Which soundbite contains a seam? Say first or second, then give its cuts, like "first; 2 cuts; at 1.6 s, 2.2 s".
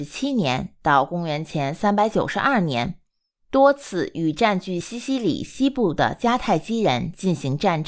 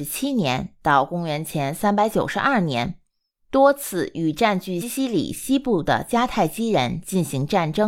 second; 1 cut; at 4.8 s